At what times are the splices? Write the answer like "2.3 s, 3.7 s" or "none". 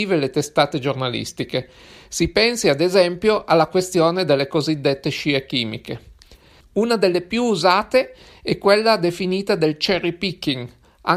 6.6 s